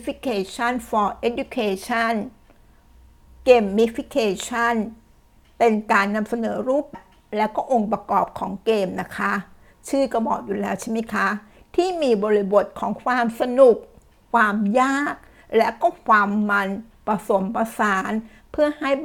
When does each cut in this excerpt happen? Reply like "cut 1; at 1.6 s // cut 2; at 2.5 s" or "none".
cut 1; at 6.9 s